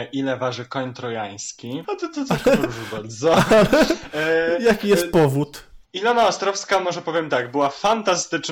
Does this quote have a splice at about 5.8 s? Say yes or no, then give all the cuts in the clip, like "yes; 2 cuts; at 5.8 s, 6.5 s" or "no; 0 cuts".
yes; 2 cuts; at 1.8 s, 5.8 s